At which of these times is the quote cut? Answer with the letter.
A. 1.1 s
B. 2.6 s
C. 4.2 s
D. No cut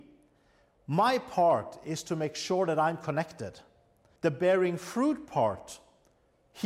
C